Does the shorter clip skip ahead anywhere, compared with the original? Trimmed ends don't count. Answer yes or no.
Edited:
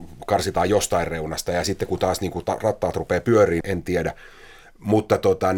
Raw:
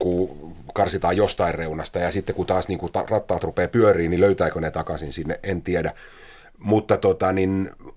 yes